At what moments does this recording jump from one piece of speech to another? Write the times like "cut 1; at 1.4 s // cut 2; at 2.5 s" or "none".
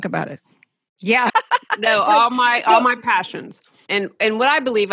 cut 1; at 1.3 s // cut 2; at 3.9 s